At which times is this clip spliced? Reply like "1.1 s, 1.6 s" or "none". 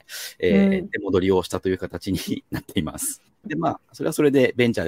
3.4 s